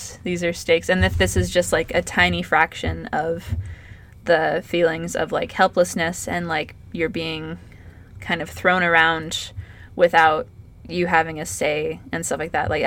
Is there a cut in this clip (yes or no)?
no